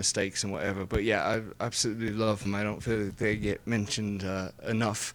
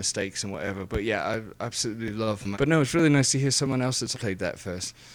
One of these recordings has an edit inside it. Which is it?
second; 2 cuts; at 2.5 s, 4.1 s

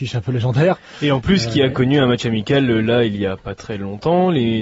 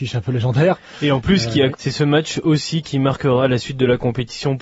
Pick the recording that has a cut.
second; 1 cut; at 1.7 s

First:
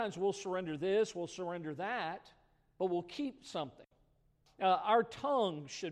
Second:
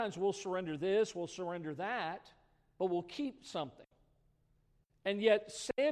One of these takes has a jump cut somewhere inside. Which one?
first; 1 cut; at 4.5 s

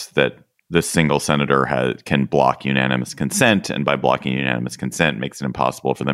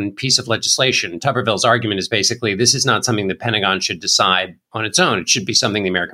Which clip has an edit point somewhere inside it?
second; 1 cut; at 4.6 s

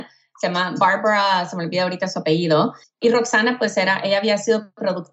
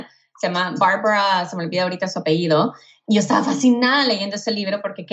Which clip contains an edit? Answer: first; 1 cut; at 2.8 s

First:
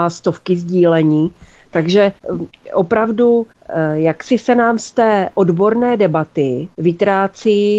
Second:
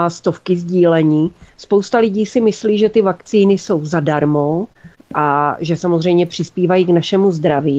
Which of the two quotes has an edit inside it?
second; 1 cut; at 1.5 s

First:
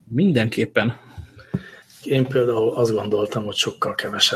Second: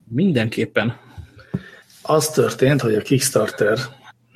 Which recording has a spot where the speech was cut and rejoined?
first; 1 cut; at 2.0 s

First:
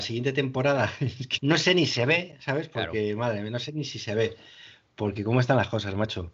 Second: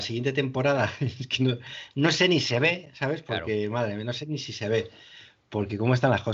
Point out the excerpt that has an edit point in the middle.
first; 1 cut; at 1.4 s

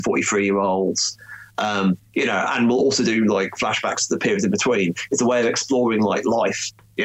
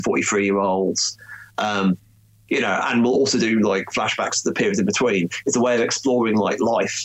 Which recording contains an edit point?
first; 1 cut; at 2.1 s

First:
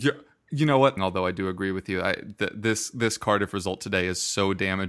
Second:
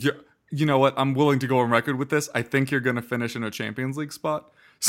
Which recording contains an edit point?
first; 1 cut; at 1.0 s

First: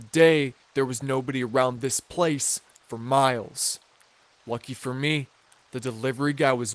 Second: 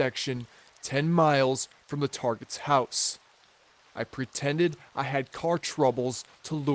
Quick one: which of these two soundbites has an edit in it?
first; 1 cut; at 4.4 s

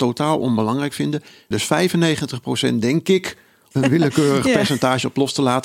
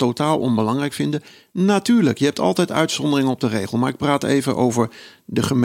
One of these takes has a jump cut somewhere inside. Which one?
first; 2 cuts; at 1.5 s, 3.7 s

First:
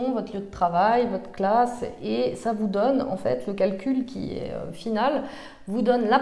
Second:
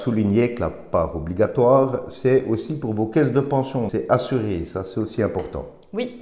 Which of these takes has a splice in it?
second; 1 cut; at 3.9 s

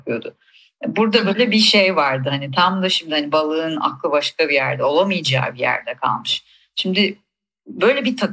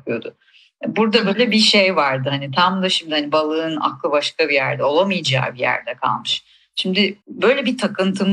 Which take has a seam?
second; 1 cut; at 7.2 s

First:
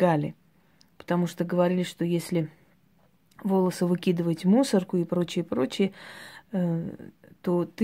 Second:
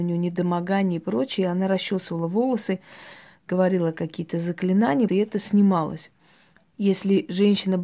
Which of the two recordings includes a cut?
second; 2 cuts; at 5.1 s, 6.6 s

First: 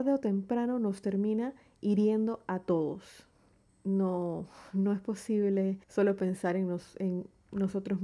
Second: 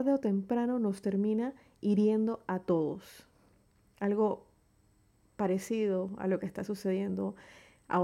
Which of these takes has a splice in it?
first; 2 cuts; at 3.7 s, 5.8 s

